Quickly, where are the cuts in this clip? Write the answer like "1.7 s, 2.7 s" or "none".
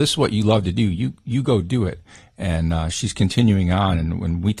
none

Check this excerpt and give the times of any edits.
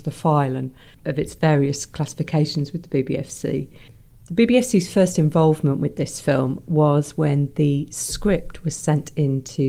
0.9 s

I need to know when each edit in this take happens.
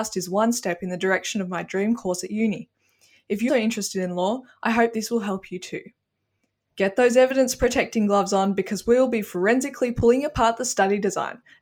3.5 s, 6.7 s

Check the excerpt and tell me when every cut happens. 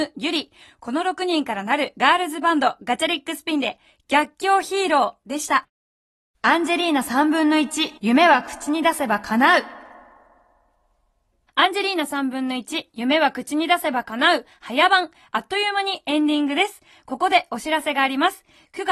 8.0 s

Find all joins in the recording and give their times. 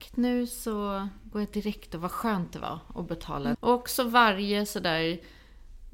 3.5 s

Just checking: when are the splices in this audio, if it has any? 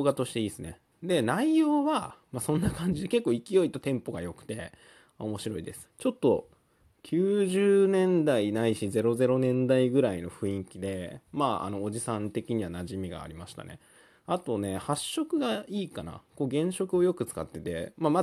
5.8 s

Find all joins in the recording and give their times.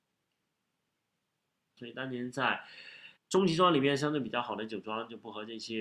1.8 s, 3.2 s

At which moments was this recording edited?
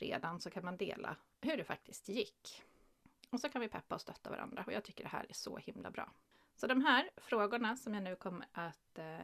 none

